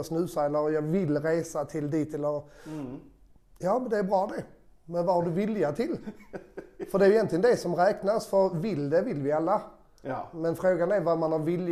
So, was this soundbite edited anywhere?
no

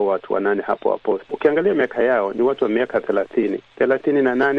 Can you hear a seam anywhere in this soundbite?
yes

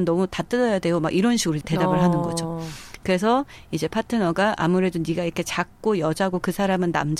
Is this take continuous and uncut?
no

